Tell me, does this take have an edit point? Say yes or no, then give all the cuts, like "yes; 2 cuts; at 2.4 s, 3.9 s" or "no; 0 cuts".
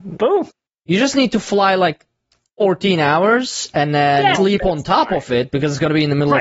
yes; 1 cut; at 4.3 s